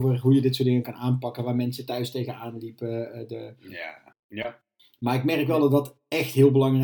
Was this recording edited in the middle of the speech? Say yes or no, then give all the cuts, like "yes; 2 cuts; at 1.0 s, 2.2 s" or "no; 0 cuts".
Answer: yes; 1 cut; at 4.1 s